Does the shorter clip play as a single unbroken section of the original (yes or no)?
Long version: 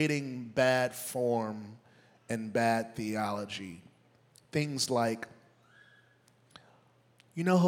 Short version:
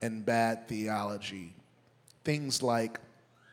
yes